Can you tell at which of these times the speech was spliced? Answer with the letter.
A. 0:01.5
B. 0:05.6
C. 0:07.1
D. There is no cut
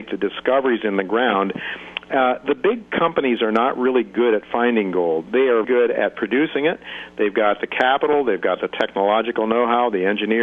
B